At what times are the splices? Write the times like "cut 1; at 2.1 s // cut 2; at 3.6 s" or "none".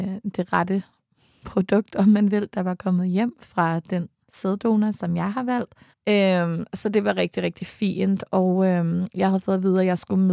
cut 1; at 5.9 s